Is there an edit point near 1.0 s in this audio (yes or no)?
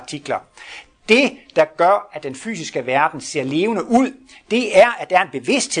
no